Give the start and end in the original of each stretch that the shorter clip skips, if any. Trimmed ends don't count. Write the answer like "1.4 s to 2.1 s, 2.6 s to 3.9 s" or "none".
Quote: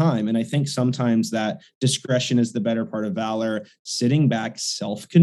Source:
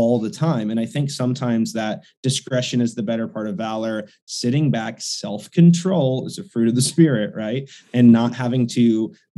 none